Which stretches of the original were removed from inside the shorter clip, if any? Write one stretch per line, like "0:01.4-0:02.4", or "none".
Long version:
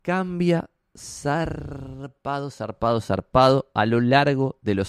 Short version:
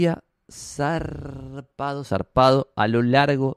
0:02.5-0:03.0